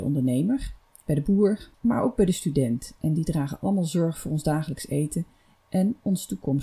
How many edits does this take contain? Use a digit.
1